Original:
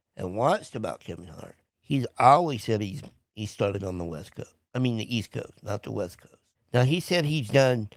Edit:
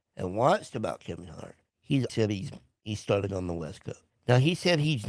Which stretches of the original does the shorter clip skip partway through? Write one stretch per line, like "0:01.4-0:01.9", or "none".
0:02.1-0:02.6
0:04.6-0:06.6